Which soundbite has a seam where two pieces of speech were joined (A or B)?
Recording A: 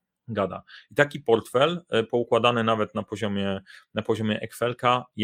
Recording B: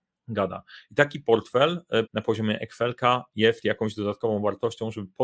B